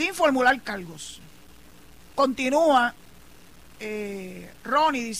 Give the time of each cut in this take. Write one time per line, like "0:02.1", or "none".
0:02.1